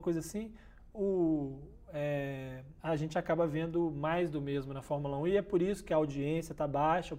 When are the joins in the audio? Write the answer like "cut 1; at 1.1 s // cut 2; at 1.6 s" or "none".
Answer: cut 1; at 2.8 s